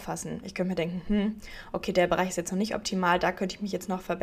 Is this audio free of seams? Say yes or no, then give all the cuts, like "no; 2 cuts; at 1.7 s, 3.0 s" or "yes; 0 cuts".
yes; 0 cuts